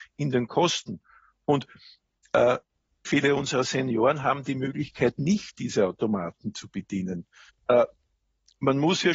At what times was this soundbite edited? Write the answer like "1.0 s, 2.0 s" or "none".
3.0 s, 7.5 s